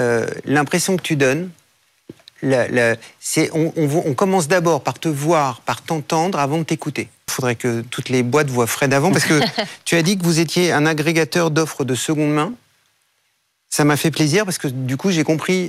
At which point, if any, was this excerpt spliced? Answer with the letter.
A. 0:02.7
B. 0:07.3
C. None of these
B